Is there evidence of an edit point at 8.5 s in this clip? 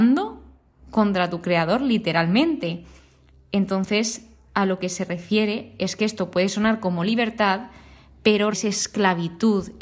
yes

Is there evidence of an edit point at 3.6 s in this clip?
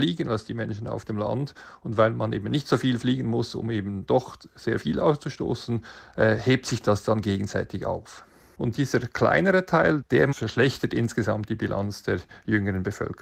no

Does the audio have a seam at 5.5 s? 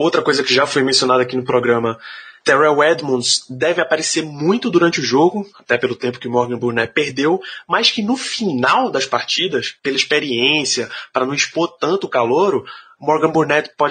no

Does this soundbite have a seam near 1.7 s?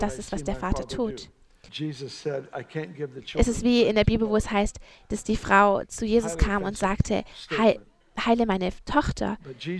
yes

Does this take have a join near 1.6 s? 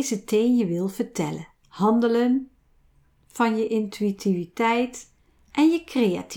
yes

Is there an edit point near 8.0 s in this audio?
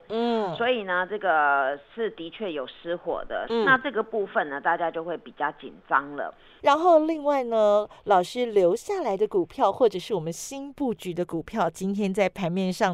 no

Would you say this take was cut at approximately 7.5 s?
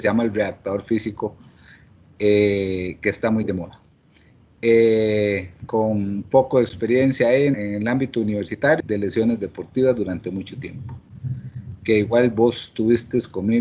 yes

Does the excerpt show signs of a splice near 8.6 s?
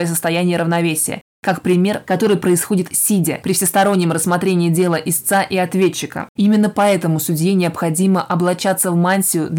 no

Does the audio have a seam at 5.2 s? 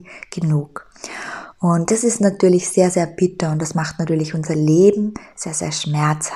no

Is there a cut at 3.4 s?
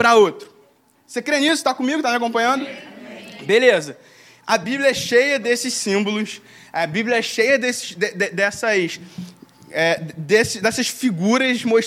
no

